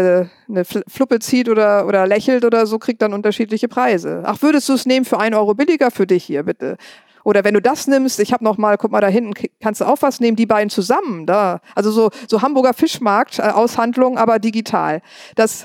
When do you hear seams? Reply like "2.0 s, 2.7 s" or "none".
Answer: none

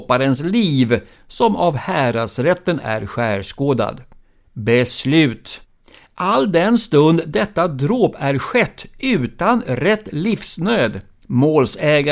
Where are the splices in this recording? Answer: 11.2 s

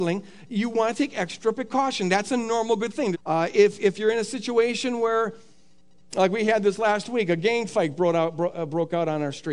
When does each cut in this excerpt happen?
3.1 s

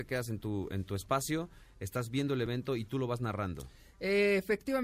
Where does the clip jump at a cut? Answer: none

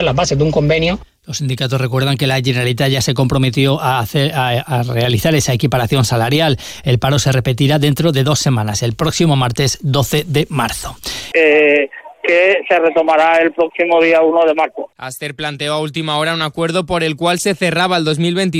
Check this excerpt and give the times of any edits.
11.3 s

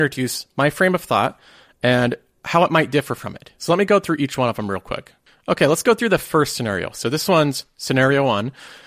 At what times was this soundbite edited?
3.6 s

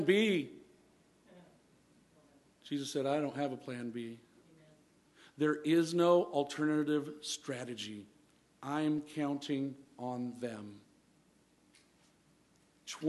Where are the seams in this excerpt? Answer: none

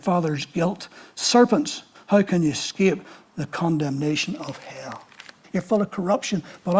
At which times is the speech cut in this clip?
1.9 s, 5.4 s

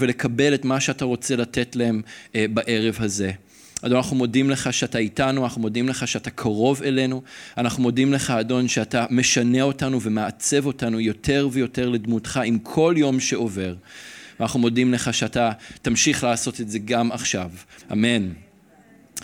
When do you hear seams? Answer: 17.8 s

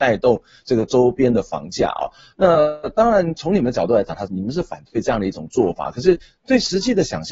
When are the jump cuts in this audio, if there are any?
none

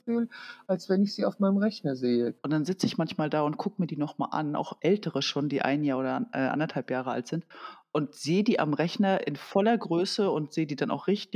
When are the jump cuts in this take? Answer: 2.4 s

